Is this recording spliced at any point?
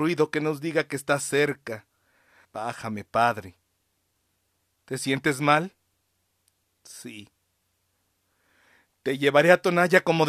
yes; 1 cut; at 2.4 s

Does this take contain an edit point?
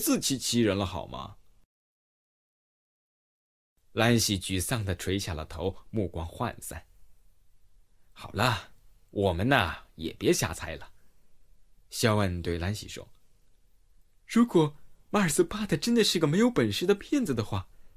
yes; 1 cut; at 11.8 s

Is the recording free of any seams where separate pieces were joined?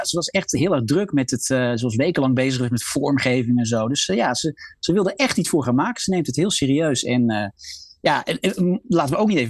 yes; 0 cuts

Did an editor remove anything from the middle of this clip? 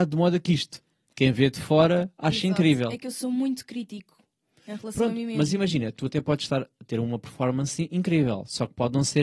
no; 0 cuts

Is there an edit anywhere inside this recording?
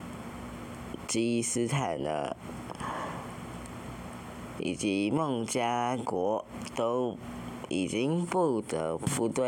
no; 0 cuts

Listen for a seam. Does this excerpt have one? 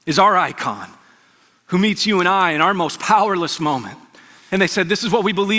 yes; 1 cut; at 4.5 s

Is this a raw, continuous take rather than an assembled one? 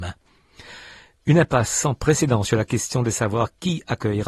yes; 0 cuts

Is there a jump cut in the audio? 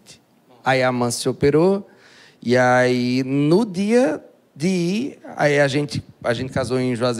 no; 0 cuts

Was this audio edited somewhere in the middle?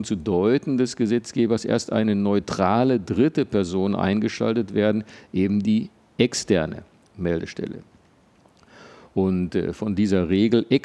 no; 0 cuts

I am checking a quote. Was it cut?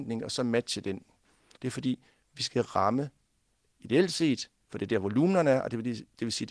yes; 1 cut; at 1.6 s

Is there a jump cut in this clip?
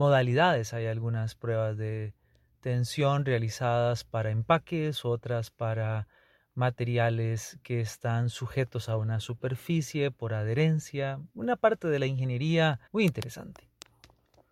yes; 2 cuts; at 11.3 s, 12.9 s

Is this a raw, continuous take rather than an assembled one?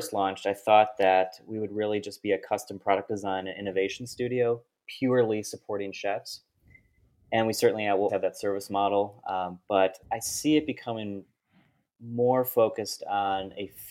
no; 2 cuts; at 8.1 s, 10.0 s

